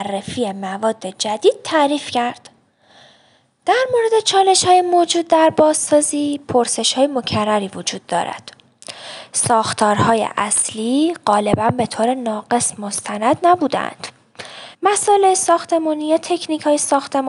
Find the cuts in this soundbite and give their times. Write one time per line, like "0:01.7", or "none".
0:14.7